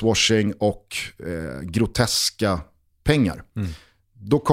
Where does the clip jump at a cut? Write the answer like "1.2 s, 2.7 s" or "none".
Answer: none